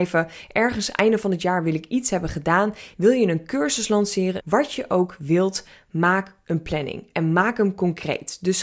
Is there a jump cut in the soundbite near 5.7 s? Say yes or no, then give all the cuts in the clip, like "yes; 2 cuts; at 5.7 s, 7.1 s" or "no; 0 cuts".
no; 2 cuts; at 2.9 s, 4.4 s